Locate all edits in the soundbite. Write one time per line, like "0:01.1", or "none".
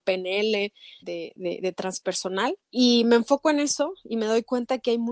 0:01.0
0:02.6